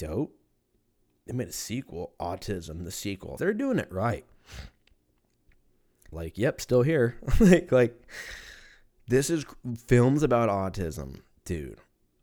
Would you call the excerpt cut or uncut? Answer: cut